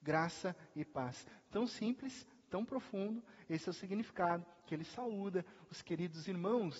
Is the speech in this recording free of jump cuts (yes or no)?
yes